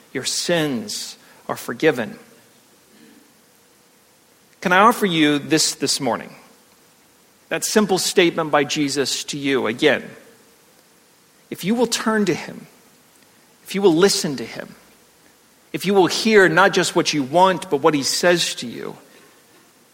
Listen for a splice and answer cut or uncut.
uncut